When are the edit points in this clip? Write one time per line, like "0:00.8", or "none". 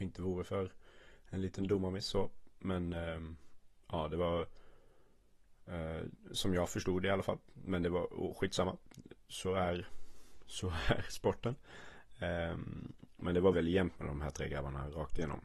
0:13.5